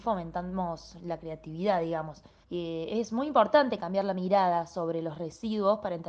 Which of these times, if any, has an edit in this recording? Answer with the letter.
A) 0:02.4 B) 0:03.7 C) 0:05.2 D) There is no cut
A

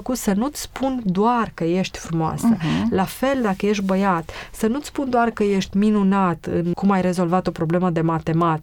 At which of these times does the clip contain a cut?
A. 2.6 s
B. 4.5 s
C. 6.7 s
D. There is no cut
C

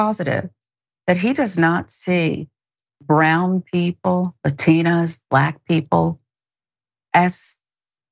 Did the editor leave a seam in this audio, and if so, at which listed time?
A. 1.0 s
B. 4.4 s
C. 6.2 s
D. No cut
D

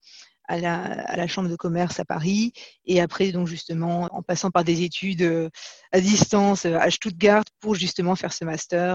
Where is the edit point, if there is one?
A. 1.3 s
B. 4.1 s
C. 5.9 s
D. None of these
B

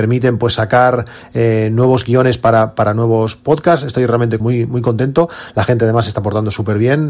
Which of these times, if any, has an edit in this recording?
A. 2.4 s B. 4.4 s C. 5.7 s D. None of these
B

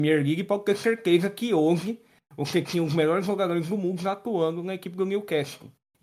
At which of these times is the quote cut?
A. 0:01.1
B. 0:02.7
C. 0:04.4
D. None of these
D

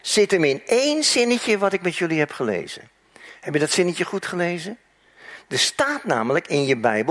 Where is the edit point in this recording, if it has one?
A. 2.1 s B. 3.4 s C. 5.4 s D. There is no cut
D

